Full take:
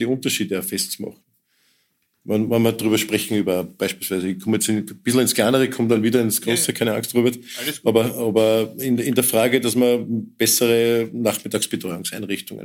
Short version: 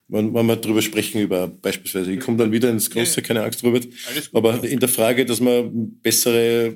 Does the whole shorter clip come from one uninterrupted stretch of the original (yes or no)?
no